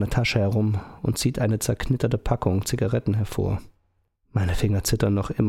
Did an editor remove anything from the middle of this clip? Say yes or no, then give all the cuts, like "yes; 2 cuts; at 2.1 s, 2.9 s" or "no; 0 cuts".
yes; 1 cut; at 4.2 s